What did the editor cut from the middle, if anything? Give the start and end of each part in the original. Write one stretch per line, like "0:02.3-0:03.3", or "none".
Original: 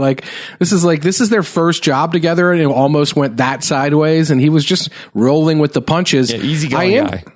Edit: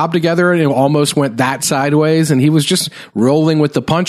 none

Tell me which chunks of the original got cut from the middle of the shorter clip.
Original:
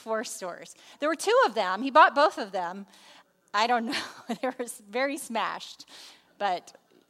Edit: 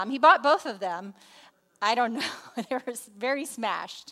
none

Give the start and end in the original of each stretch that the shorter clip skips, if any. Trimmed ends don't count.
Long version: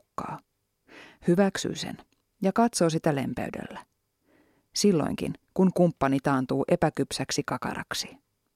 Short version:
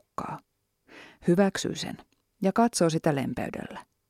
none

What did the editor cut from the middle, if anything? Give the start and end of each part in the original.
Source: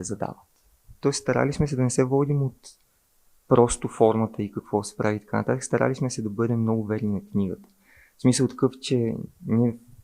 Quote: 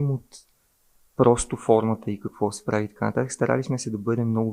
none

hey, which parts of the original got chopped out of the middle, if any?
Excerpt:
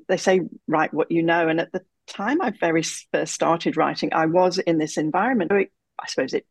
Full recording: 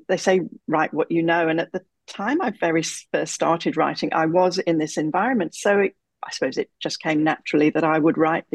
0:05.5-0:05.7

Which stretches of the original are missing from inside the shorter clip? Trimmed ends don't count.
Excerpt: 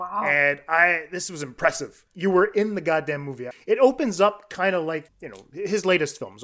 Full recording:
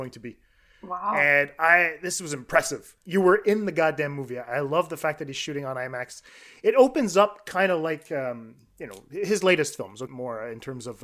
0:04.4-0:06.5
0:08.0-0:08.7

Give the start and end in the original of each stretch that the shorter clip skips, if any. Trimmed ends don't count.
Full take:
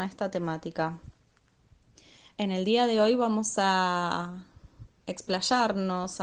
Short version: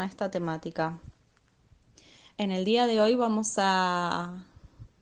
none

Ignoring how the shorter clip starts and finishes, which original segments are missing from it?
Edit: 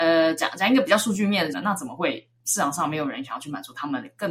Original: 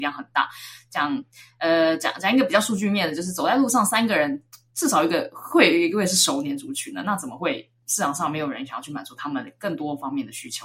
0:03.2-0:06.9

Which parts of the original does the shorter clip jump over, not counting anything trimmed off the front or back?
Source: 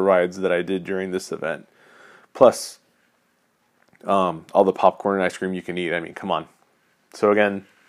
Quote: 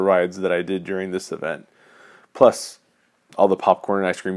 0:03.3-0:04.5

